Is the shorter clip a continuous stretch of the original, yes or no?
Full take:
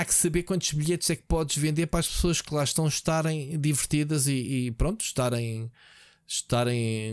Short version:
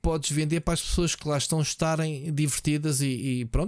yes